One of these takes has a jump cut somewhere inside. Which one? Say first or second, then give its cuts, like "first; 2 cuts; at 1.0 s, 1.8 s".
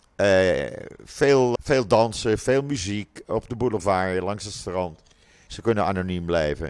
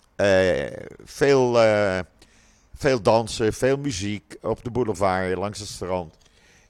first; 2 cuts; at 1.6 s, 5.5 s